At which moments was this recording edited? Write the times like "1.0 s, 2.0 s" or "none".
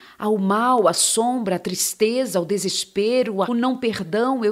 3.5 s